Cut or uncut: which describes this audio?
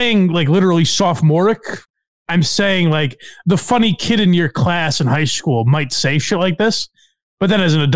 uncut